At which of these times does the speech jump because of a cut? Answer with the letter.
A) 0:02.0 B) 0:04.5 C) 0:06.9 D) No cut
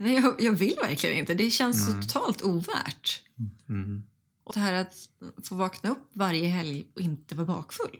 B